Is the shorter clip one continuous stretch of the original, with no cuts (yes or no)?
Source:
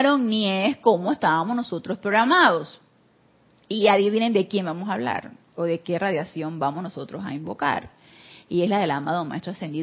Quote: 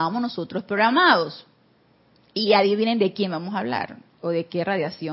yes